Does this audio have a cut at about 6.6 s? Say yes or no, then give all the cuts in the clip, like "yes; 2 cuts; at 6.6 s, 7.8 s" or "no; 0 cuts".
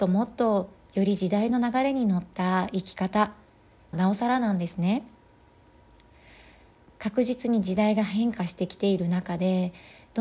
no; 1 cut; at 3.9 s